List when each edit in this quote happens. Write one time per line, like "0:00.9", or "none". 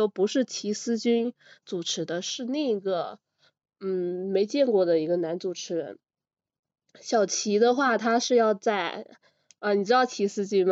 none